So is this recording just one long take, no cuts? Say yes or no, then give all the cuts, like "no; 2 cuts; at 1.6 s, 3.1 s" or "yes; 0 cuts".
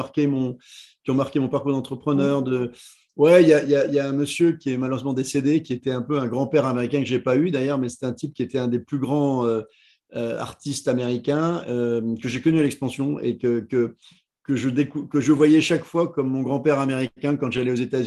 yes; 0 cuts